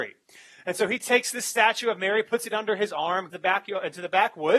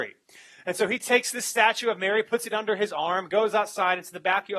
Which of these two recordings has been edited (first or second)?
first